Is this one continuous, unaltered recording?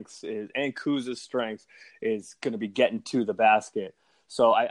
yes; 0 cuts

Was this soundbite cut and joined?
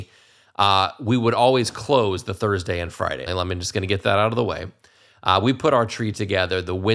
yes; 1 cut; at 3.3 s

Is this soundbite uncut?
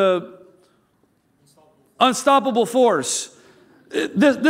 yes; 0 cuts

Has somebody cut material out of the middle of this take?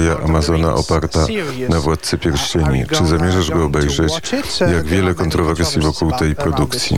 no; 0 cuts

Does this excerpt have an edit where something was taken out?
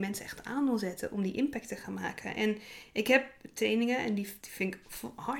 yes; 1 cut; at 4.4 s

